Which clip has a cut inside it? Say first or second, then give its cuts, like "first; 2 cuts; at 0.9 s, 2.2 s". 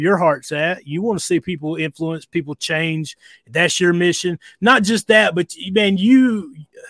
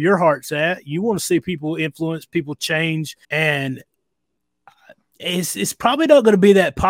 second; 1 cut; at 3.2 s